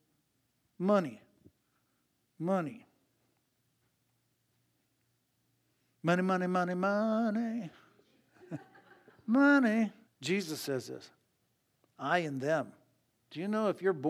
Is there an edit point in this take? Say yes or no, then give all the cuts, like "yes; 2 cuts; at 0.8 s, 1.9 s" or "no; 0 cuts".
yes; 1 cut; at 10.1 s